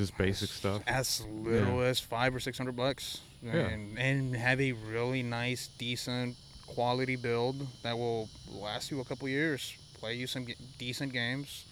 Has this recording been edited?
no; 0 cuts

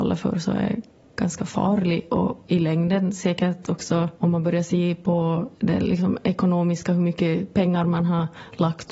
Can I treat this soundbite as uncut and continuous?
no; 3 cuts; at 2.4 s, 4.1 s, 5.5 s

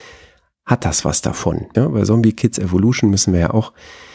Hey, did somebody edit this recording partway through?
yes; 1 cut; at 1.7 s

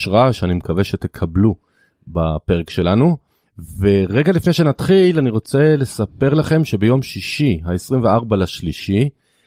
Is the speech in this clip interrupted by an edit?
no; 0 cuts

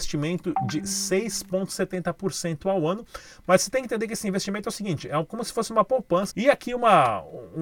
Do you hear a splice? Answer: yes; 1 cut; at 6.3 s

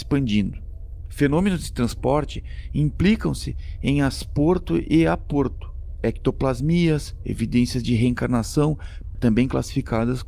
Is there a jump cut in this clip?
yes; 1 cut; at 9.1 s

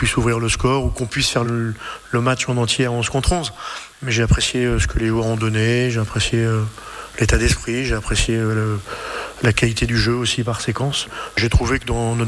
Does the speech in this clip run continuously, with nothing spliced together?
no; 1 cut; at 1.4 s

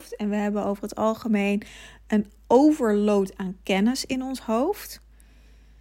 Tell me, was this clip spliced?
no; 0 cuts

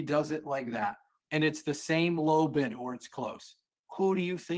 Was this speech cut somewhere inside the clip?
yes; 1 cut; at 1.2 s

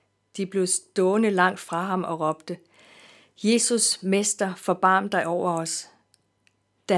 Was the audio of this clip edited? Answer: no; 0 cuts

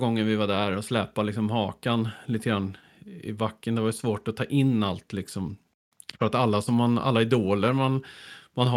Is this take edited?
no; 0 cuts

